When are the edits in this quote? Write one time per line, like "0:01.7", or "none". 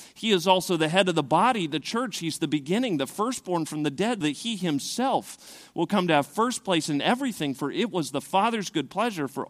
0:04.2